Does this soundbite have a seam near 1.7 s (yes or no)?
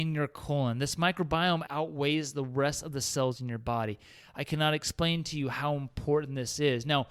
yes